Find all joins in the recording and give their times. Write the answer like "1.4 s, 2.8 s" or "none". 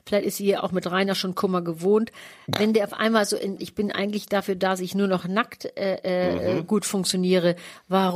3.6 s